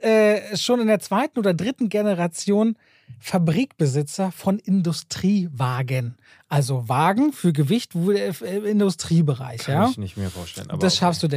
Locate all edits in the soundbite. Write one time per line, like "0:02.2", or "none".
none